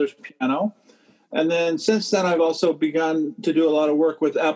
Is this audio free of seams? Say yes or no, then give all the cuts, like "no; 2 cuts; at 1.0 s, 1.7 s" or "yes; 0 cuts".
yes; 0 cuts